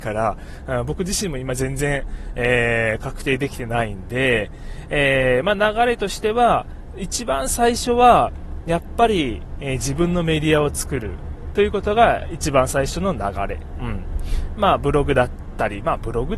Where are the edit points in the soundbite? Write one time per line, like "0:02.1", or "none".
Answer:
none